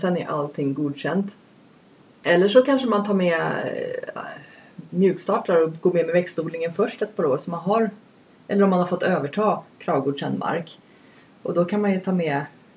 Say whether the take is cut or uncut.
uncut